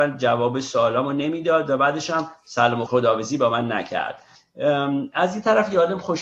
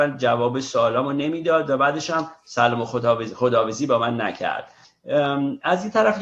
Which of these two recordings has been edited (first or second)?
first